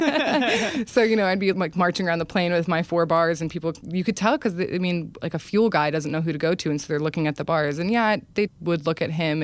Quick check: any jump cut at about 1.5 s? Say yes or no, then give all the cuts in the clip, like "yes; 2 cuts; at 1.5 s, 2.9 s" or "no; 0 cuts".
yes; 2 cuts; at 1.5 s, 8.5 s